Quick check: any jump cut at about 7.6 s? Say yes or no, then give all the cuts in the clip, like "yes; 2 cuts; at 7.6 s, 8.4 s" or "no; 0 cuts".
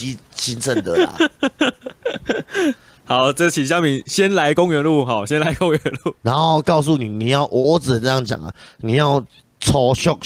yes; 2 cuts; at 3.0 s, 7.6 s